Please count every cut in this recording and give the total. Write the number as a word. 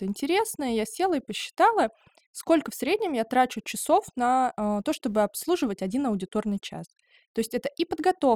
zero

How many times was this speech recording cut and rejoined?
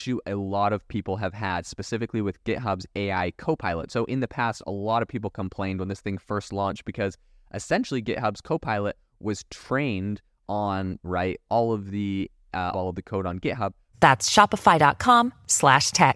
two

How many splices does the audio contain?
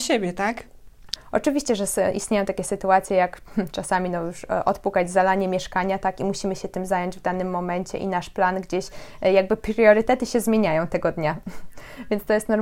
one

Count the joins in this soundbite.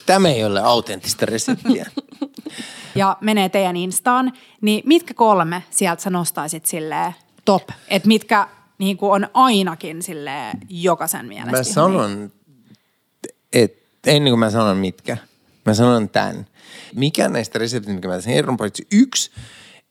two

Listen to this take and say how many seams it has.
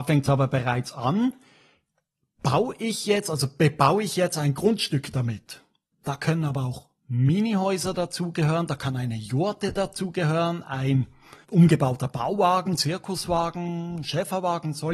two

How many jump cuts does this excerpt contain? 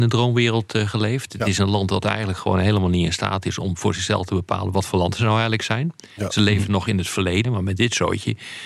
one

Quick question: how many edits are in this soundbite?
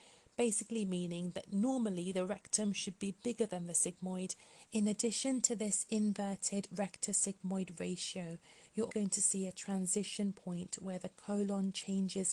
two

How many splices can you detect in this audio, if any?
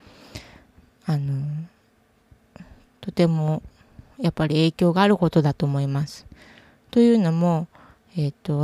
zero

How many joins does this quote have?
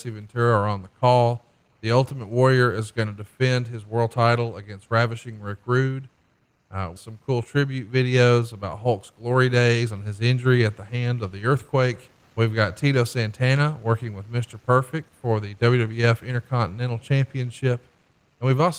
two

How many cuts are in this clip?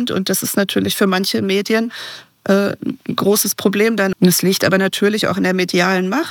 one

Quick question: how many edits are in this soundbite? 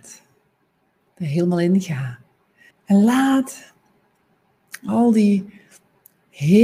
one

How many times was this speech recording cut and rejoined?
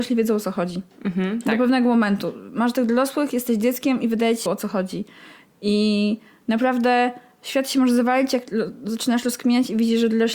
one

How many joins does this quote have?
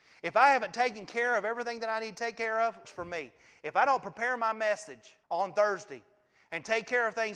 two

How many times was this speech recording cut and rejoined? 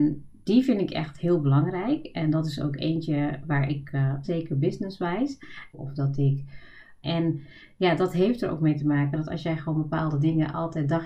three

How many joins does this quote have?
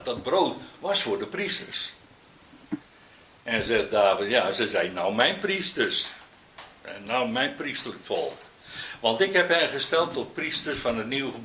zero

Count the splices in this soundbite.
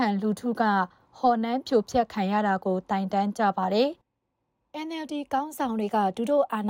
one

